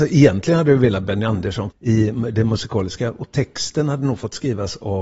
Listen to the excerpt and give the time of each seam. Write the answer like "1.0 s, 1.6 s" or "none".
1.7 s